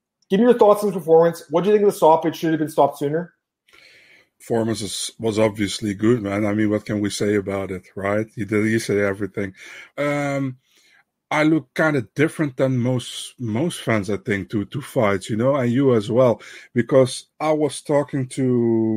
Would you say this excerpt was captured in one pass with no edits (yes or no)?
no